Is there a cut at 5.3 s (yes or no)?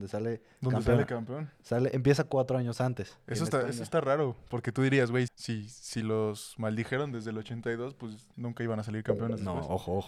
yes